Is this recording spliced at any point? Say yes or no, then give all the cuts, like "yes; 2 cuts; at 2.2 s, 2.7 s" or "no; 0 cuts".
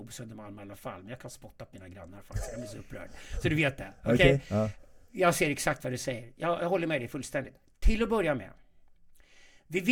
no; 0 cuts